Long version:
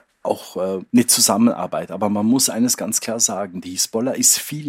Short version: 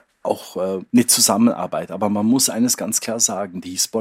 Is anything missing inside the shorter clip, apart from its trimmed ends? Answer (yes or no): no